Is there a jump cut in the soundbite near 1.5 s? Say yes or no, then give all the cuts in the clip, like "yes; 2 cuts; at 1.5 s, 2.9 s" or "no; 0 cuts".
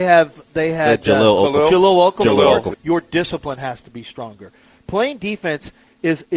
no; 1 cut; at 2.7 s